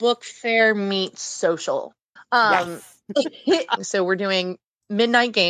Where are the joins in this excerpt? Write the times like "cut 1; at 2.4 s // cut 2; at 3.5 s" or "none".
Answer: cut 1; at 2.2 s // cut 2; at 3.8 s